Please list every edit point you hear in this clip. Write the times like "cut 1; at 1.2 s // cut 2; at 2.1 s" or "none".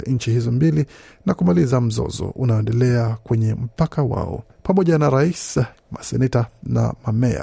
cut 1; at 4.5 s // cut 2; at 5.7 s